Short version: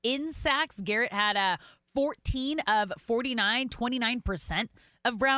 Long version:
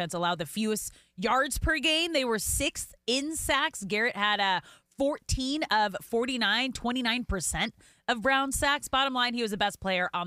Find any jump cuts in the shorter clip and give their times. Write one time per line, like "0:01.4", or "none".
none

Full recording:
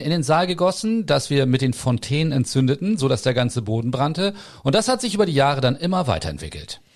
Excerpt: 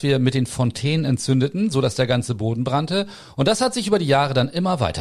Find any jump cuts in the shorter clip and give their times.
none

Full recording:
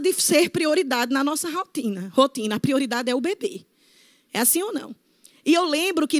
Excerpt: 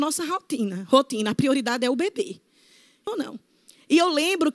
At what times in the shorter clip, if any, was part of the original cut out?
0:03.1

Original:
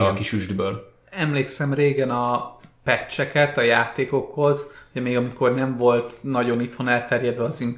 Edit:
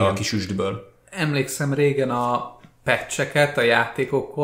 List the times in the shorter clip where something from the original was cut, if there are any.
none

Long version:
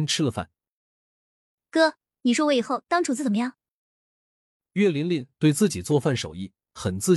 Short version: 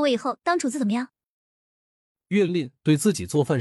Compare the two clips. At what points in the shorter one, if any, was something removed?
0:02.5

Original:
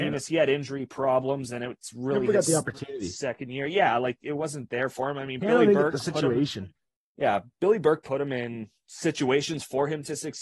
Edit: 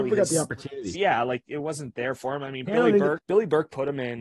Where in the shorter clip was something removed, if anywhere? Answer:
0:00.9
0:03.2

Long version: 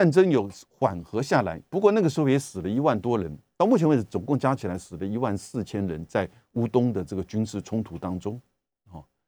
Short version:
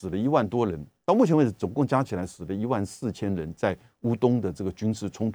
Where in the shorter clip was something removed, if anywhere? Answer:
none

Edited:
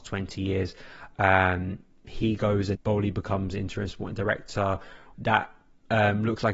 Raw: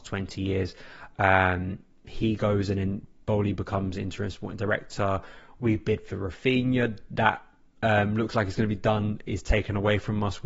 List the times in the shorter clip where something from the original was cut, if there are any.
0:02.7
0:05.1

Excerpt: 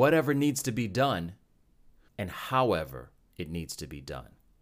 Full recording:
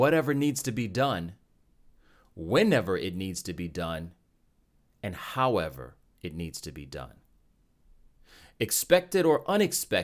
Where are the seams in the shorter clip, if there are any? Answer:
0:02.1

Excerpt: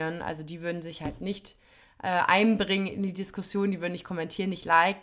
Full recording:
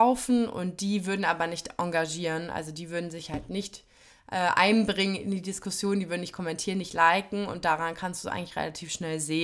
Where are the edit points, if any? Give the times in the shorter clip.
none

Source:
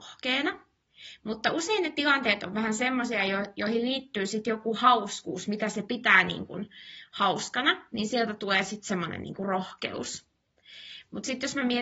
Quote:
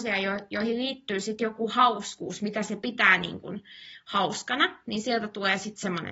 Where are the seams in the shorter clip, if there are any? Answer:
none

